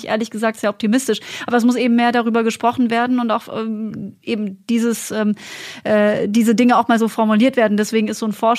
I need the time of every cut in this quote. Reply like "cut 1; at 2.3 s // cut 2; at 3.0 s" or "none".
none